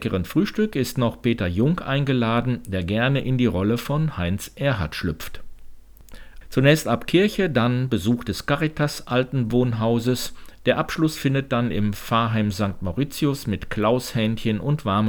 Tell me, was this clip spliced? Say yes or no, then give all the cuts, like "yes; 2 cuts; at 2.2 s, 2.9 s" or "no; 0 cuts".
yes; 1 cut; at 6.4 s